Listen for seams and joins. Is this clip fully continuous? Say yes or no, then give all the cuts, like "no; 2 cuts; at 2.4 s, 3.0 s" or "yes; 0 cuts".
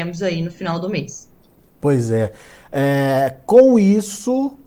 yes; 0 cuts